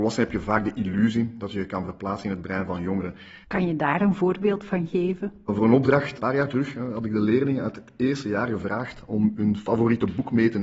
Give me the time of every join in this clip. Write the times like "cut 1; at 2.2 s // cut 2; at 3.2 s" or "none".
cut 1; at 3.4 s